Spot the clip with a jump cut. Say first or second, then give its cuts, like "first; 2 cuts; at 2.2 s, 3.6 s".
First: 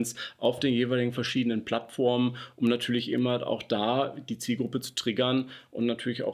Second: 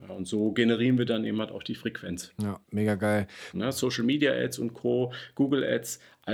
second; 1 cut; at 3.5 s